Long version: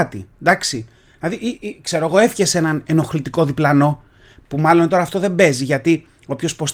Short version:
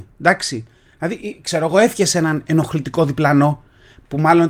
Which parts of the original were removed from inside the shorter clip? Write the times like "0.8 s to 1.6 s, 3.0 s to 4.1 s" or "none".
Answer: 1.4 s to 1.6 s